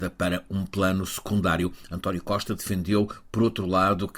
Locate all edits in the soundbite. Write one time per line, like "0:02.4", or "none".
none